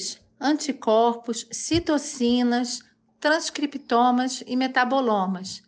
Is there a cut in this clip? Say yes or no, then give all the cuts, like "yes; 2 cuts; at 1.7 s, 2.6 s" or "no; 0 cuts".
yes; 1 cut; at 3.1 s